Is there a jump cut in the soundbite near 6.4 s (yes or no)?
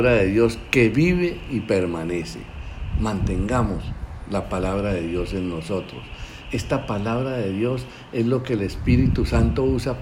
no